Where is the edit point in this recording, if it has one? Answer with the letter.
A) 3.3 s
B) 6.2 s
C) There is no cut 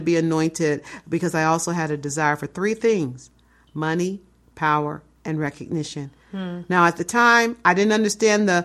C